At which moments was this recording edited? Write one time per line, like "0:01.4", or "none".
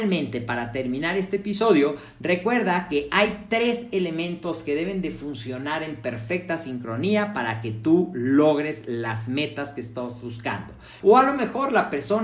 0:11.0

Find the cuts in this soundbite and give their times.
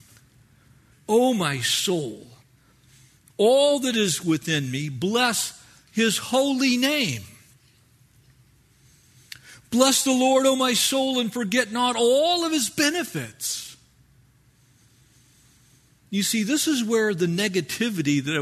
0:00.9

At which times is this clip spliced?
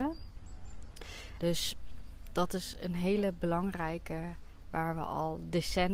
0:01.4

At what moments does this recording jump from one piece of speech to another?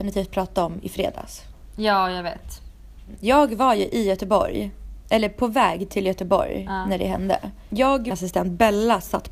0:08.1

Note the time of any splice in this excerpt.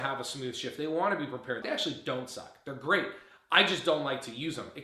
0:01.6

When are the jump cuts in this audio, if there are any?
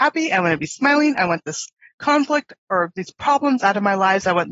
none

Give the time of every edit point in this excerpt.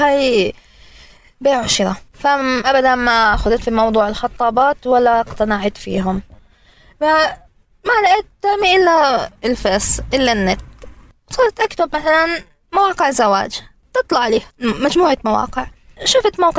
0:02.1
0:09.4
0:14.5

